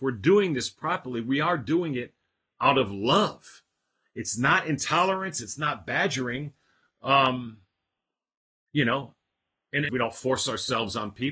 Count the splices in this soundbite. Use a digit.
1